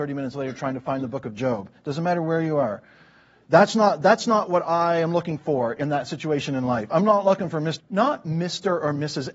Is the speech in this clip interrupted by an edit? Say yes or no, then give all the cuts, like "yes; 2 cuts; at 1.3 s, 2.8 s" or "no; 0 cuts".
yes; 2 cuts; at 3.4 s, 7.8 s